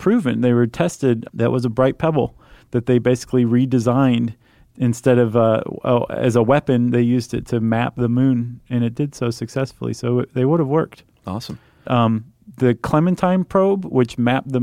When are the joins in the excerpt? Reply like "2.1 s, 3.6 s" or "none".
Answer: 1.2 s, 11.8 s